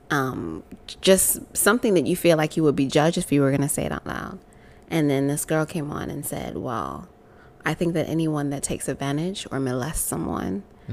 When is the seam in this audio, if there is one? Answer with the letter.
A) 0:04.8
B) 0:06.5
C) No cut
C